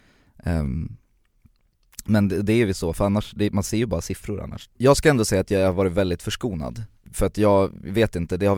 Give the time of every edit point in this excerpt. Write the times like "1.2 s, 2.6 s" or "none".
4.7 s, 7.1 s

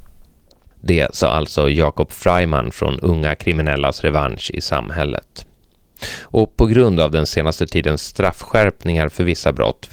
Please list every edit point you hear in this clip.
none

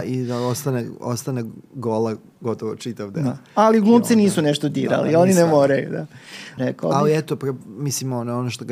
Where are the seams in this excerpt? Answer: 6.6 s

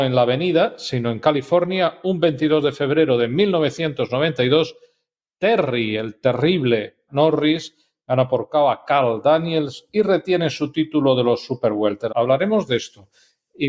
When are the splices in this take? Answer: 7.1 s, 12.1 s

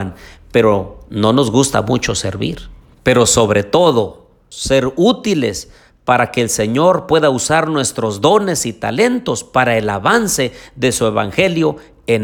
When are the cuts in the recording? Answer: 2.9 s, 4.5 s

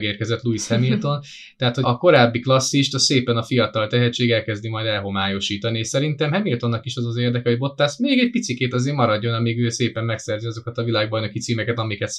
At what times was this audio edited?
1.8 s

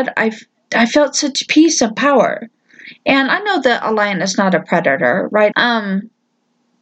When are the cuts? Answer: 5.5 s

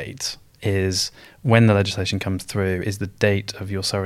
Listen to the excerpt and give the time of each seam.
none

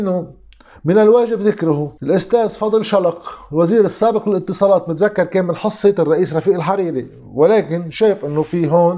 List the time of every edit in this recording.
2.0 s

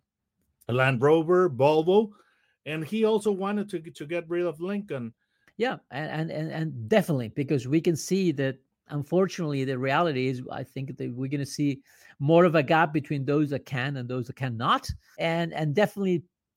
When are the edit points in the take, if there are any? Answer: 5.5 s, 15.1 s

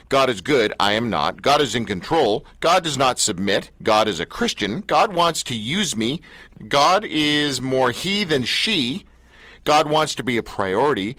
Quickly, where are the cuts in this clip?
none

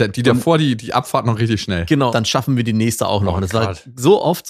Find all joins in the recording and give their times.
2.1 s

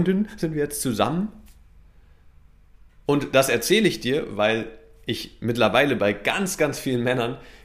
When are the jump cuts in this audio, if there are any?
none

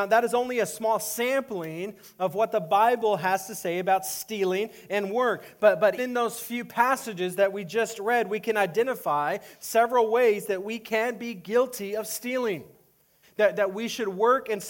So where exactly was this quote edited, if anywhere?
6.0 s, 13.2 s

